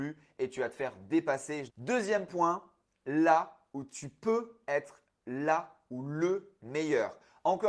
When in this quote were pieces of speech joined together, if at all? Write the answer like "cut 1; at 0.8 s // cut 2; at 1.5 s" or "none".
cut 1; at 1.7 s